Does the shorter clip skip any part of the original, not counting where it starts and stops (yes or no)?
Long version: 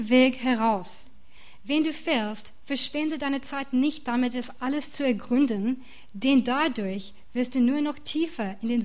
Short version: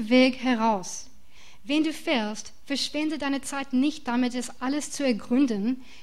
no